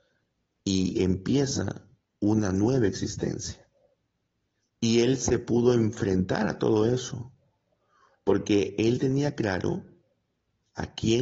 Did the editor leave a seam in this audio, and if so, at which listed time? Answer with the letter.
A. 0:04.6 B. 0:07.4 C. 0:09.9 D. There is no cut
A